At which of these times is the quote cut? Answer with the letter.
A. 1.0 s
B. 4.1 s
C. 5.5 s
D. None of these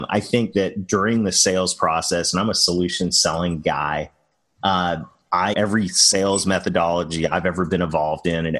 C